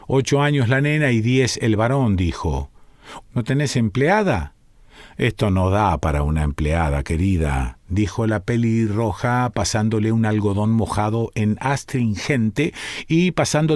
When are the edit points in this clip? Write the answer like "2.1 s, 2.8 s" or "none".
3.2 s